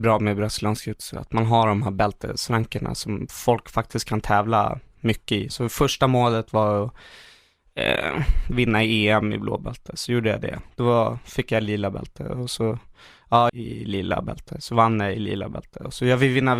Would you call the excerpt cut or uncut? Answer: cut